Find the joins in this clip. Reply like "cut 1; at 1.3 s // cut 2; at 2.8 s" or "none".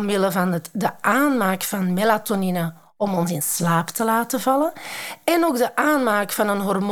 none